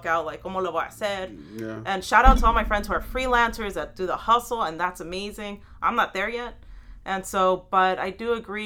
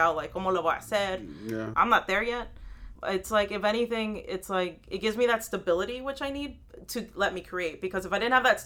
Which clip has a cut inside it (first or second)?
second